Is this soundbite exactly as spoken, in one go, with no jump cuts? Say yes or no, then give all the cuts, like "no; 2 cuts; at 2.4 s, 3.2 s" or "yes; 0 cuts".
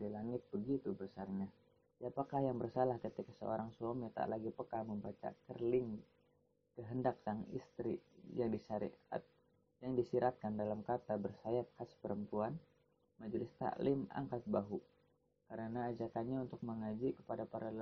no; 1 cut; at 1.9 s